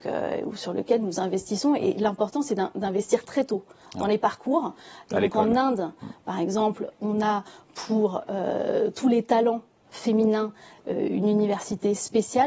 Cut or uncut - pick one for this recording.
uncut